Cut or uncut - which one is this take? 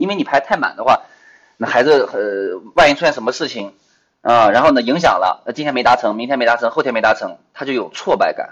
uncut